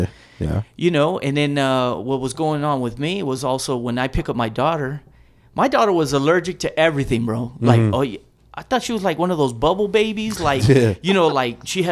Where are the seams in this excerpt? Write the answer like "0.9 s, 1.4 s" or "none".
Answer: none